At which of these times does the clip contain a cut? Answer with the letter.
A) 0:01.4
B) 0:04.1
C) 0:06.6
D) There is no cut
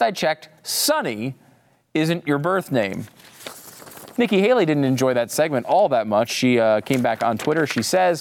B